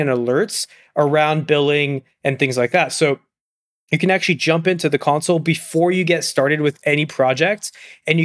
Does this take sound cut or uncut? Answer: uncut